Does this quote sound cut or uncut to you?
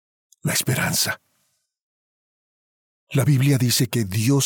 uncut